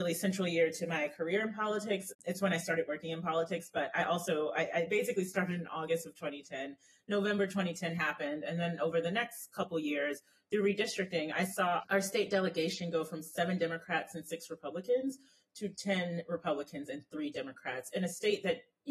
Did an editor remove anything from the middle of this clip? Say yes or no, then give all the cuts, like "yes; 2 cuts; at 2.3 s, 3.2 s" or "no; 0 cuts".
no; 0 cuts